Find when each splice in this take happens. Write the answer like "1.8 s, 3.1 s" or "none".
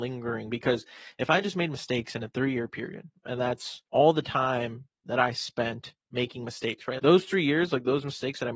3.9 s, 7.0 s